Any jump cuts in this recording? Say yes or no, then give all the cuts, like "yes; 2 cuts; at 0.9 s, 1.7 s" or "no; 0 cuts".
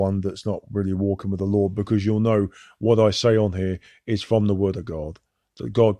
no; 0 cuts